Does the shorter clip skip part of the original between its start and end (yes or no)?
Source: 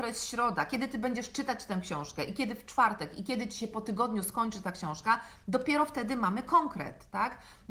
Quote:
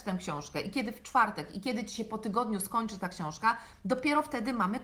no